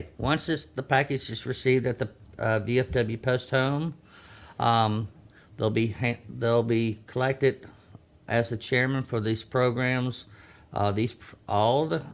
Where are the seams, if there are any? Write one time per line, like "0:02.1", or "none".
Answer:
none